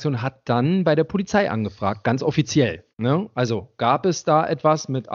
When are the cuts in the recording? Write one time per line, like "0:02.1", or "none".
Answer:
0:02.9